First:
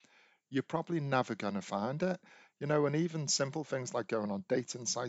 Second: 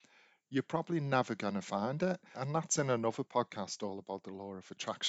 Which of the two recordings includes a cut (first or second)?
second